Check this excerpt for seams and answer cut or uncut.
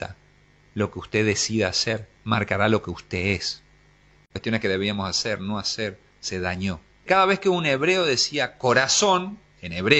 cut